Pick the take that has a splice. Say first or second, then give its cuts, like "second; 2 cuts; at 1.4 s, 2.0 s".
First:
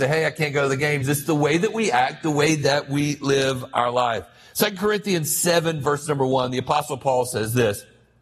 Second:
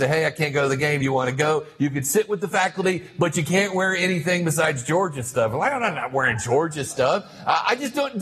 first; 1 cut; at 1.0 s